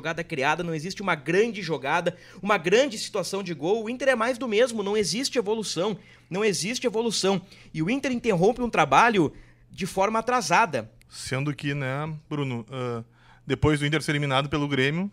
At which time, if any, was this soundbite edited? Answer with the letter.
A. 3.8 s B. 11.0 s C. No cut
B